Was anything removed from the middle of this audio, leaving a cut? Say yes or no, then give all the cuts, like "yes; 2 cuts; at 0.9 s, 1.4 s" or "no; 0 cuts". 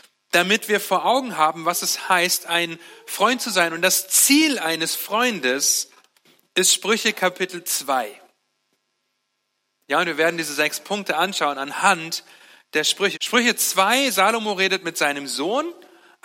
yes; 1 cut; at 13.1 s